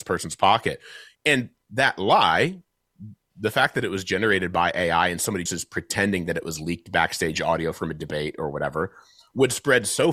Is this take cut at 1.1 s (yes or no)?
yes